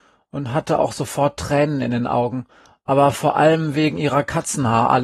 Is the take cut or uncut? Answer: uncut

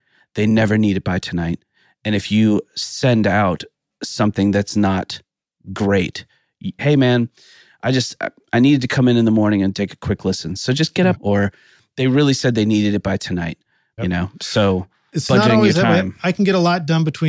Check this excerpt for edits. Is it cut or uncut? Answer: cut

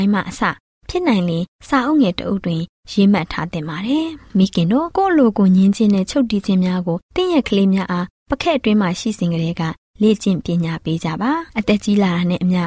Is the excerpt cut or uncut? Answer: uncut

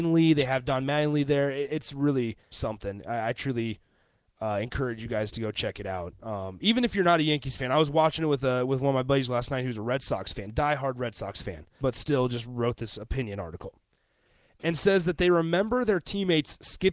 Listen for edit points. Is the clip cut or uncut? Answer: cut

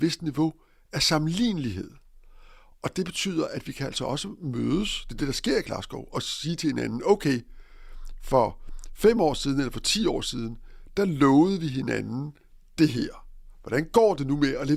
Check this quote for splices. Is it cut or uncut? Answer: uncut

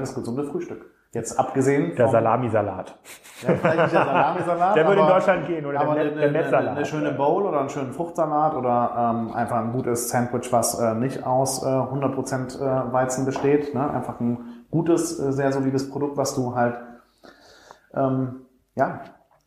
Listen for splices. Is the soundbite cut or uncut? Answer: uncut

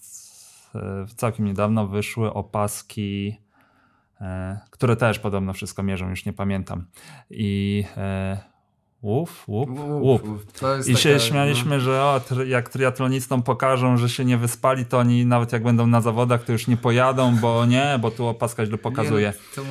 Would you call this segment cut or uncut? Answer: uncut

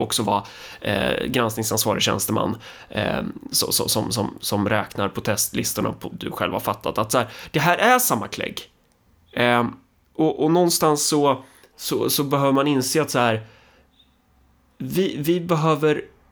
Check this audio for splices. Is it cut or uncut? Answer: cut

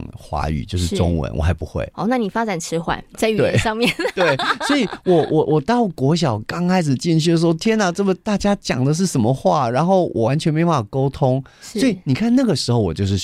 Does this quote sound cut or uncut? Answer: uncut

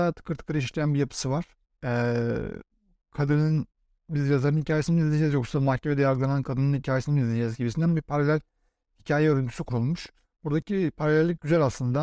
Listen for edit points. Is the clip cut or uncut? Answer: uncut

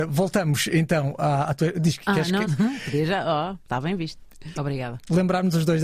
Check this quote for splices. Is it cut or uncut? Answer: cut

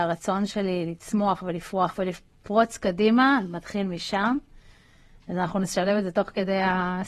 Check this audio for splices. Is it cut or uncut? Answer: uncut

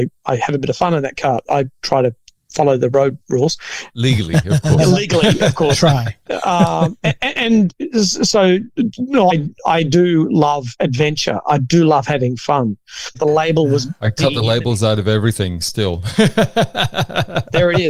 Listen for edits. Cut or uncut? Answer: cut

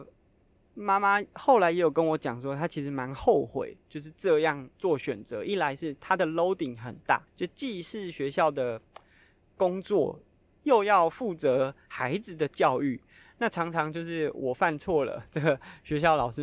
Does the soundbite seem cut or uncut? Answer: cut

